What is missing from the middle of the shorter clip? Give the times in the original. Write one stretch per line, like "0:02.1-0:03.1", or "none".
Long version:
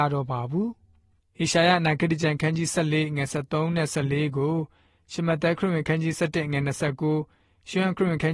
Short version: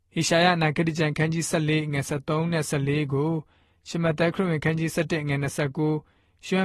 none